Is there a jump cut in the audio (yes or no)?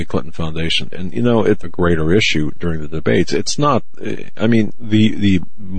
yes